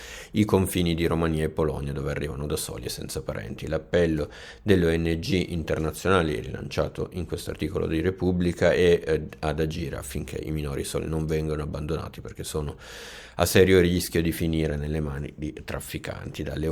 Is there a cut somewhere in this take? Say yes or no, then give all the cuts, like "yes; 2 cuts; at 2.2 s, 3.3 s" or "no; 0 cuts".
no; 0 cuts